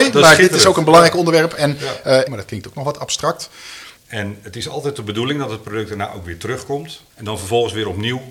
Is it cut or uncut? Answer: cut